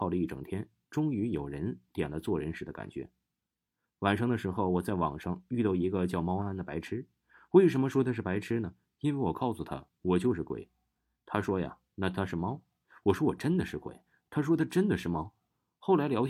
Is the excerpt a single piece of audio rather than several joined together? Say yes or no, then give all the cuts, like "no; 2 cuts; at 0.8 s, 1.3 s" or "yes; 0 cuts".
no; 1 cut; at 6.4 s